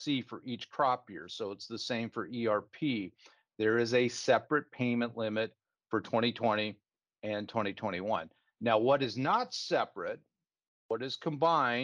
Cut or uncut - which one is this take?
uncut